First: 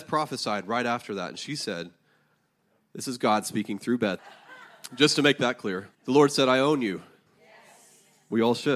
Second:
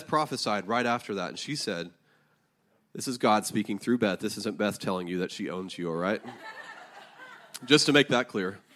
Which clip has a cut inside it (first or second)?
first